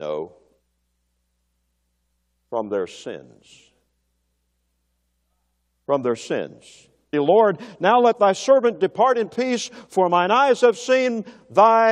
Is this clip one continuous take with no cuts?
no; 1 cut; at 7.1 s

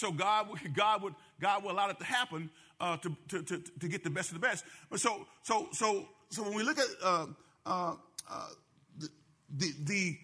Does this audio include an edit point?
no; 0 cuts

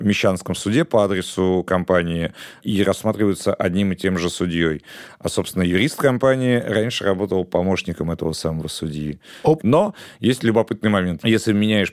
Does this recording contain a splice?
yes; 1 cut; at 9.6 s

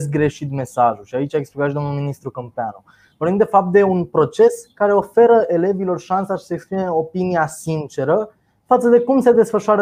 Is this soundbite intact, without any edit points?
yes; 0 cuts

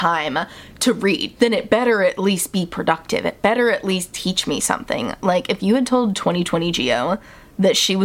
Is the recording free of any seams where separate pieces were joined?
no; 1 cut; at 1.3 s

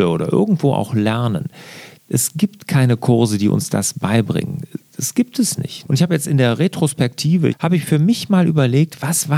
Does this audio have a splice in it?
yes; 2 cuts; at 5.8 s, 7.5 s

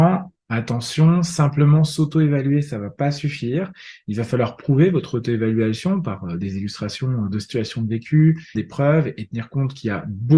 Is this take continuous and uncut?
no; 1 cut; at 8.5 s

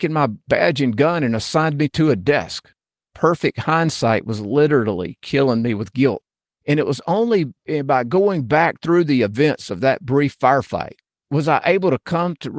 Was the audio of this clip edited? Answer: yes; 2 cuts; at 3.0 s, 6.5 s

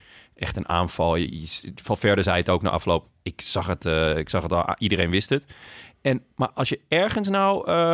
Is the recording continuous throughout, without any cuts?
yes; 0 cuts

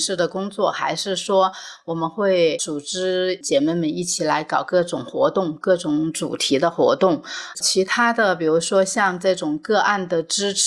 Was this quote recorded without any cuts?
yes; 0 cuts

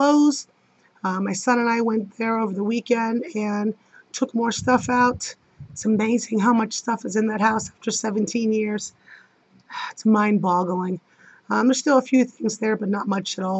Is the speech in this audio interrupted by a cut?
no; 0 cuts

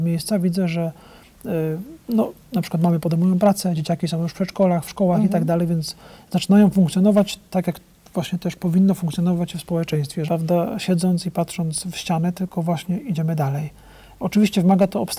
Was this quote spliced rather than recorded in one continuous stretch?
yes; 1 cut; at 10.3 s

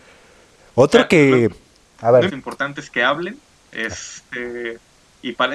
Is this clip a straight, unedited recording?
no; 1 cut; at 2.3 s

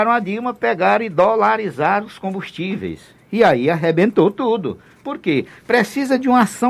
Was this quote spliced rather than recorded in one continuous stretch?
no; 0 cuts

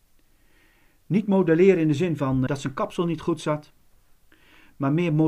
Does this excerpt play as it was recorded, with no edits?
no; 1 cut; at 2.5 s

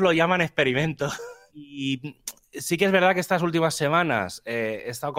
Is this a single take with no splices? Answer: no; 1 cut; at 1.5 s

